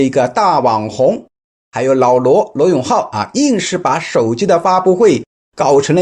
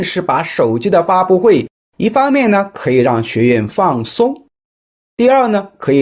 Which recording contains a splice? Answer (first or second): second